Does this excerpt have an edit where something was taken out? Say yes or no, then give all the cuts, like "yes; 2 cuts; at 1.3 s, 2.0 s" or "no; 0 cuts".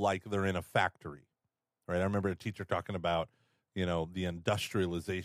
no; 0 cuts